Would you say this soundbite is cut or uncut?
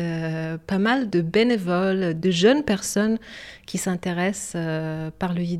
cut